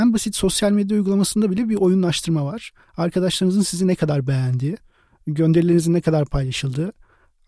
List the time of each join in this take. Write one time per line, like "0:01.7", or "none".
none